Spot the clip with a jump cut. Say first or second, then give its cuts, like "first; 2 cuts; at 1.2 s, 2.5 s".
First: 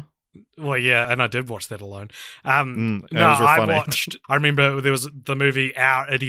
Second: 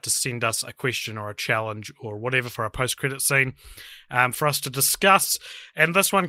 first; 2 cuts; at 1.0 s, 4.2 s